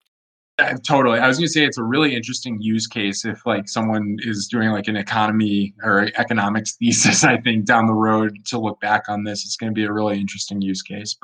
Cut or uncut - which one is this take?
uncut